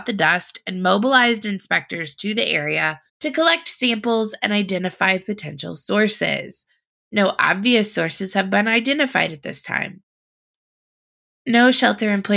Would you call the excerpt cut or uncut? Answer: cut